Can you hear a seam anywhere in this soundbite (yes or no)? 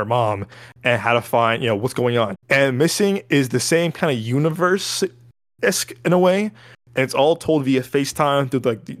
yes